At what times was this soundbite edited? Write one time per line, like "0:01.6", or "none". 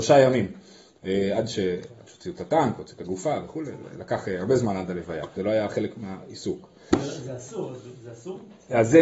0:05.4